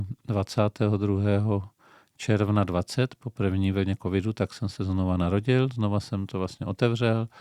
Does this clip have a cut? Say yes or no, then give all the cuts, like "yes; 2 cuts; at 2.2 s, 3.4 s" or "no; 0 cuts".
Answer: no; 0 cuts